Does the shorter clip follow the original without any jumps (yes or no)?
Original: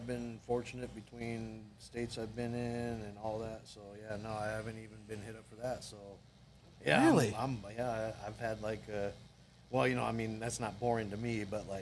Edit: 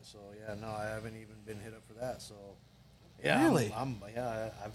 yes